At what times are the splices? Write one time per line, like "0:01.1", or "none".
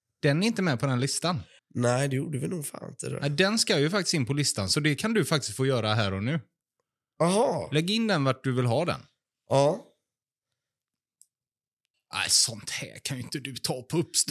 0:01.6